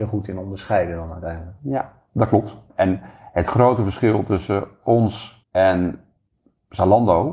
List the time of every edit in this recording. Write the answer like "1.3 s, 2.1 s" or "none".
2.7 s, 5.4 s